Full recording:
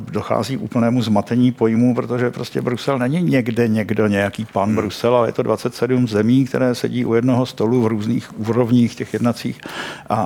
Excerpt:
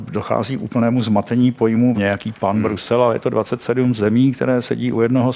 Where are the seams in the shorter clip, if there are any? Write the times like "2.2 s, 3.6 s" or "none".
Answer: 1.9 s